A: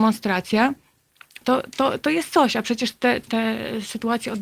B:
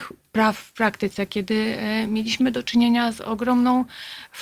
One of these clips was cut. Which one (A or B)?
A